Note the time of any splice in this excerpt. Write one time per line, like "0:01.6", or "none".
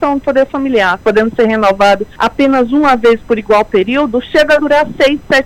0:01.0